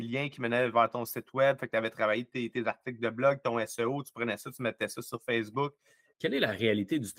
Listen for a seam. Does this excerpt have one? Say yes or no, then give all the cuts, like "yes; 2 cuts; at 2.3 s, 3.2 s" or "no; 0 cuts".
yes; 1 cut; at 6.1 s